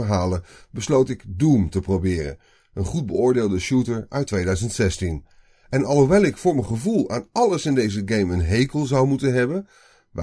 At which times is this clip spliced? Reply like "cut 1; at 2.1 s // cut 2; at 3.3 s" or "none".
none